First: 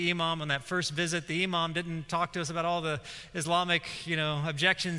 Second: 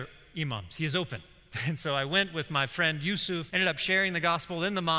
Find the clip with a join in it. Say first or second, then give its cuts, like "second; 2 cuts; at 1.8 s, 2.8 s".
second; 1 cut; at 3.5 s